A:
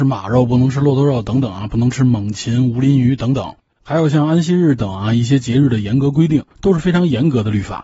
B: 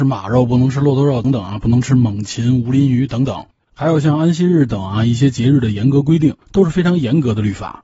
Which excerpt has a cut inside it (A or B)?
B